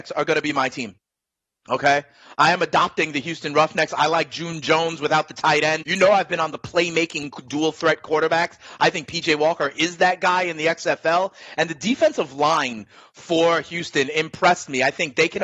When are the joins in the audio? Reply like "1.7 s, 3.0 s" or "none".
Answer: 5.8 s